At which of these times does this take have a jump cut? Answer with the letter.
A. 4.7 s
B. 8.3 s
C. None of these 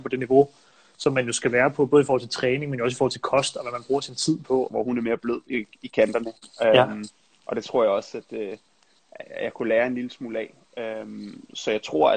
A